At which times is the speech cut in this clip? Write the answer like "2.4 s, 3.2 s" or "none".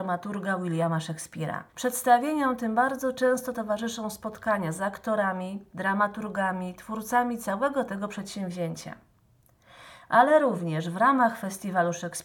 1.7 s